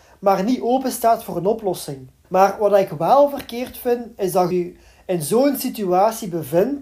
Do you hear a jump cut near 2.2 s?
yes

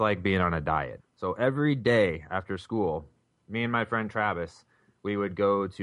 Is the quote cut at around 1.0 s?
yes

